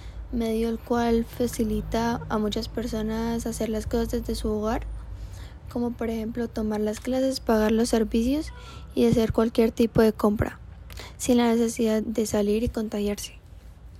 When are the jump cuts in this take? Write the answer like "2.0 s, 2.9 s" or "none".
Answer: 12.0 s